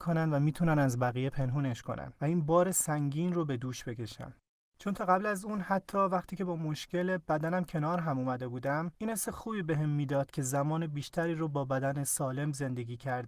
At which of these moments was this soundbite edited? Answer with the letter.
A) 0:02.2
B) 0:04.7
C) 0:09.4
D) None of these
B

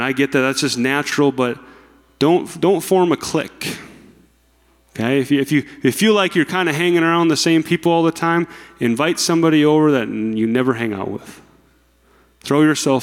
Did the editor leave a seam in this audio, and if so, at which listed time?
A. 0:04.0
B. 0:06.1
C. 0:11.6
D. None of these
D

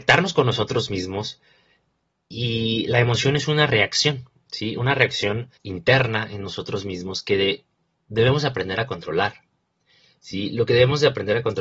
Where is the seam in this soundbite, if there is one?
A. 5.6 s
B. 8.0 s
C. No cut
A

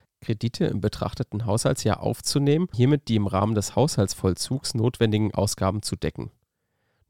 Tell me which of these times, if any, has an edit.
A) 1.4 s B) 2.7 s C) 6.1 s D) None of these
B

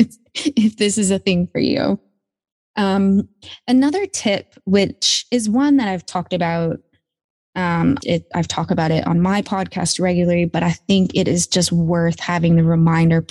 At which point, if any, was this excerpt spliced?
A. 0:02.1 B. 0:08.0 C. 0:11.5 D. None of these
B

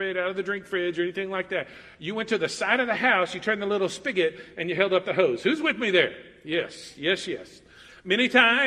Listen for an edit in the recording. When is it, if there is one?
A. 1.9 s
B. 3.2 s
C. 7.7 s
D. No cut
D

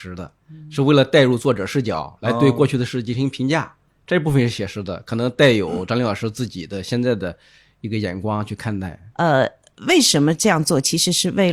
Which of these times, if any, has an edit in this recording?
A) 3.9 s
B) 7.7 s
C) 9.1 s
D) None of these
C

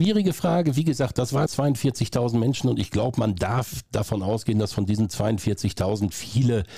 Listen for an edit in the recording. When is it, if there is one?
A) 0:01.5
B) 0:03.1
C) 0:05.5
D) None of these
A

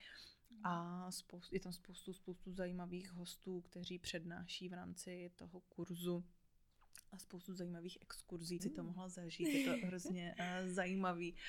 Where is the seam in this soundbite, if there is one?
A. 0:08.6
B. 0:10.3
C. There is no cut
A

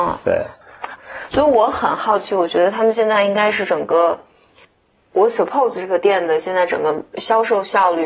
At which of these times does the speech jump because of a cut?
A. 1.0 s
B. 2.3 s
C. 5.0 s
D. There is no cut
A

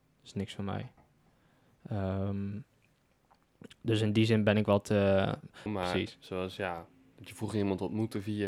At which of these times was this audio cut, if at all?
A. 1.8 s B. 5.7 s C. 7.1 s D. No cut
B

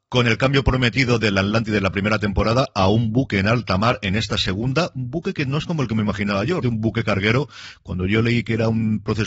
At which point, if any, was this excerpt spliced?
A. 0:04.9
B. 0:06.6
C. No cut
B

